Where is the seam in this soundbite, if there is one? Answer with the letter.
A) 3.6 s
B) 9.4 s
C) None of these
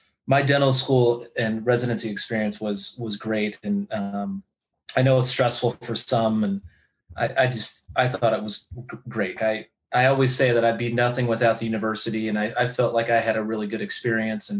B